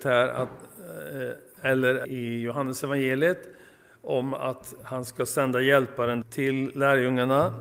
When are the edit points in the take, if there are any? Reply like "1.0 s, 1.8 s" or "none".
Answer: 2.0 s, 6.2 s